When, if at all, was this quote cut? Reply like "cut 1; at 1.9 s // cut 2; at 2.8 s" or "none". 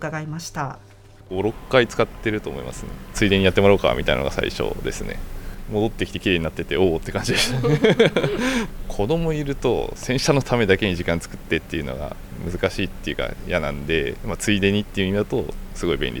cut 1; at 3.1 s